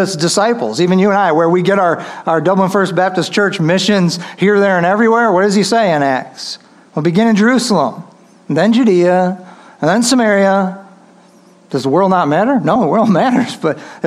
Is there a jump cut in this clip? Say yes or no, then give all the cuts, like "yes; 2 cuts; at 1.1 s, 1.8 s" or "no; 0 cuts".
no; 0 cuts